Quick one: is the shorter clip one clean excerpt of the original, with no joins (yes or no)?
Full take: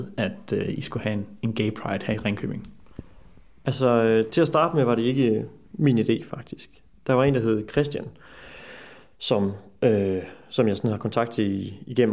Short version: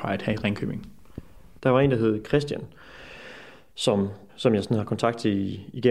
no